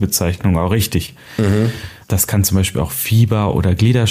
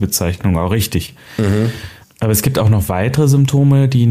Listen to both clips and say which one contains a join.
first; 1 cut; at 2.1 s

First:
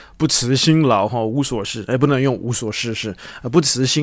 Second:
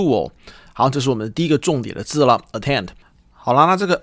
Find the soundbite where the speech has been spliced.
first; 1 cut; at 1.6 s

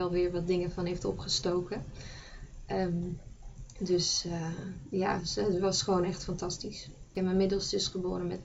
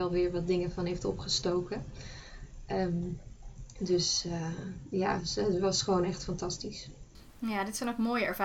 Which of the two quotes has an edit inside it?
first; 1 cut; at 7.2 s

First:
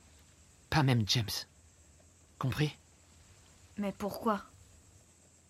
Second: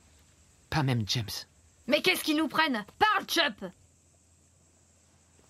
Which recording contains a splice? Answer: second; 2 cuts; at 1.8 s, 2.9 s

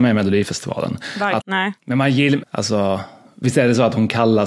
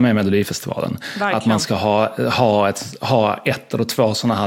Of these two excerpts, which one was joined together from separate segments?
first; 2 cuts; at 1.4 s, 2.4 s

